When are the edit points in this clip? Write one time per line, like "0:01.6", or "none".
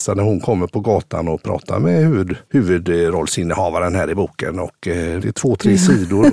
0:02.4
0:05.2